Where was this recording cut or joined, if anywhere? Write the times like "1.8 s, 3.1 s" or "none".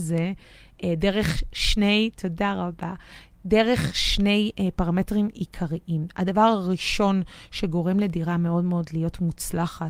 none

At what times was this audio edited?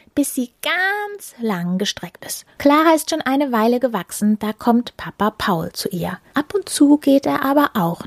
2.6 s, 6.3 s

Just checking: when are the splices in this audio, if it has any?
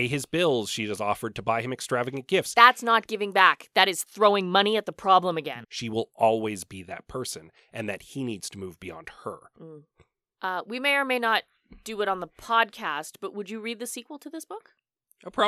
5.6 s

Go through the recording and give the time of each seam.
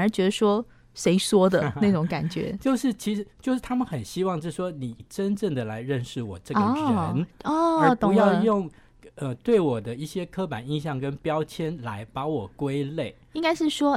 5.0 s

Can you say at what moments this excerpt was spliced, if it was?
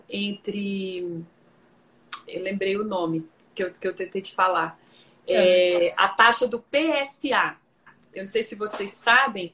none

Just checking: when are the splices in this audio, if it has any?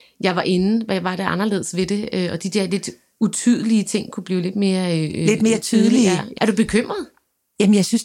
6.4 s

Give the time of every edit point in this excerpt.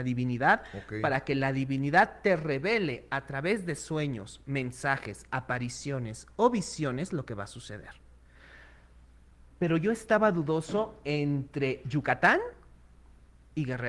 none

